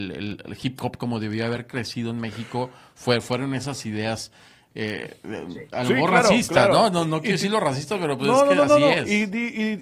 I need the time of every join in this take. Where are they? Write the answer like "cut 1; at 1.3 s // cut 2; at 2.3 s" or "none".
none